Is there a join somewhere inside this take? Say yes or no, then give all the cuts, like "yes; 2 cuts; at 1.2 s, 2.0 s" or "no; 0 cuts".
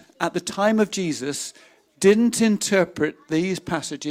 no; 0 cuts